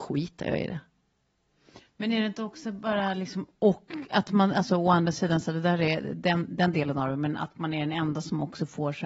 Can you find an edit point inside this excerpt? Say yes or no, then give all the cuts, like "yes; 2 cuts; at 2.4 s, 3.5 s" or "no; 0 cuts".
no; 0 cuts